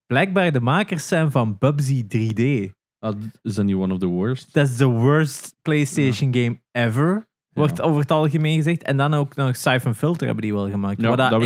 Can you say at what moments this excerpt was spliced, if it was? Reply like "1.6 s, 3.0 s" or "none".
none